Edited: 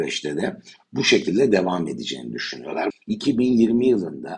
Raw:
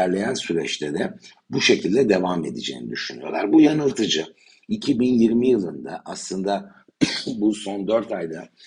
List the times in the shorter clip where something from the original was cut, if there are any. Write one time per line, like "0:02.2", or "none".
0:02.9